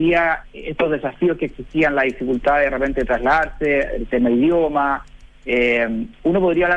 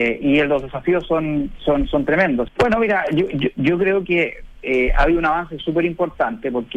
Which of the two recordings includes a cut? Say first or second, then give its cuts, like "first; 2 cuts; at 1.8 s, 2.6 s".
second; 1 cut; at 2.5 s